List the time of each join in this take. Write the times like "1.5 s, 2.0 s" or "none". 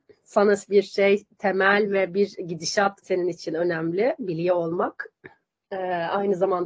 3.0 s